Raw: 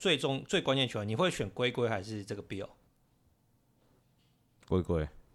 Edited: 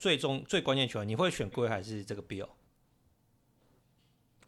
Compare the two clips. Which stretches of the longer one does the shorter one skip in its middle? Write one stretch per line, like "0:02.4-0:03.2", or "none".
0:01.5-0:01.7